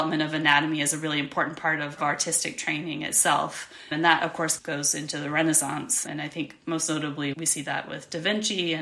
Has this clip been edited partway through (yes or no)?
no